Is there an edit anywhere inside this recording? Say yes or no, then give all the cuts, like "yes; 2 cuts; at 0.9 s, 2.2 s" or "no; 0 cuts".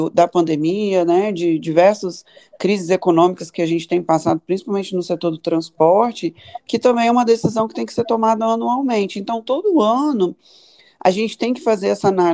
no; 0 cuts